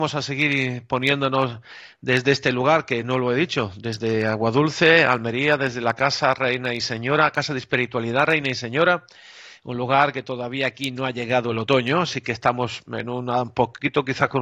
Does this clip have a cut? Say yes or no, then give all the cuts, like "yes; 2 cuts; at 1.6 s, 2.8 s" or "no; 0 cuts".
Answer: no; 0 cuts